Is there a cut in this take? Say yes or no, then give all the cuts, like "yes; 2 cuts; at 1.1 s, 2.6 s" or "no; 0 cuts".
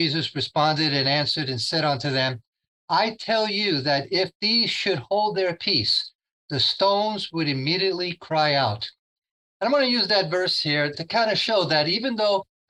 no; 0 cuts